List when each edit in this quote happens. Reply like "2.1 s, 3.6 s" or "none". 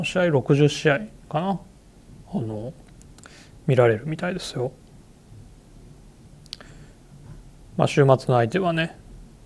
none